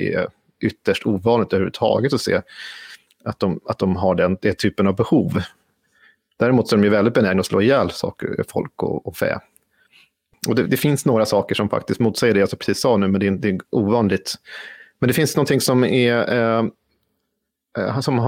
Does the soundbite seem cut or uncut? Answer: uncut